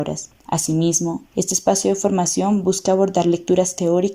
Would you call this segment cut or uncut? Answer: cut